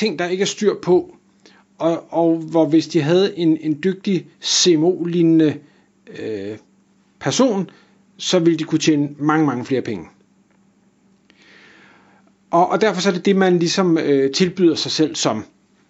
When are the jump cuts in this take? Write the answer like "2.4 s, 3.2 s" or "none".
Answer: none